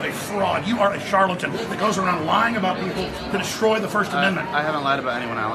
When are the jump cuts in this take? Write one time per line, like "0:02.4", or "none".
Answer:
none

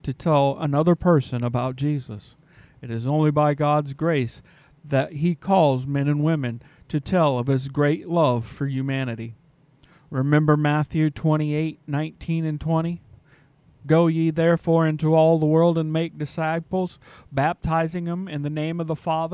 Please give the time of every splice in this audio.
none

